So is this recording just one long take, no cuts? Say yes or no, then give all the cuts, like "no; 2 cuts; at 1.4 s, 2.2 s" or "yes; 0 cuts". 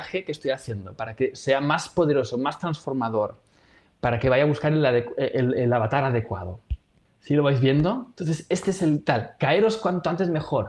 yes; 0 cuts